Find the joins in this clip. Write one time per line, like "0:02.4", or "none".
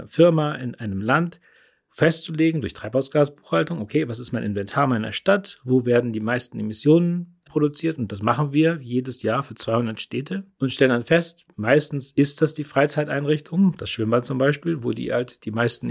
none

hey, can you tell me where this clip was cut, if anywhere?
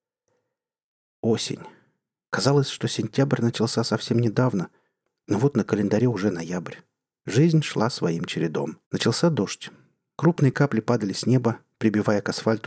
0:08.8

